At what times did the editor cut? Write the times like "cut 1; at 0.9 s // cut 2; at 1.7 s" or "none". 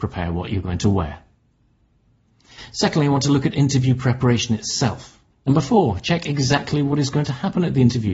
cut 1; at 5.3 s